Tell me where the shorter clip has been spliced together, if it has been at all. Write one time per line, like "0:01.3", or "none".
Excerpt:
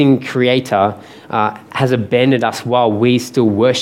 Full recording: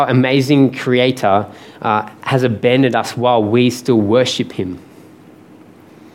none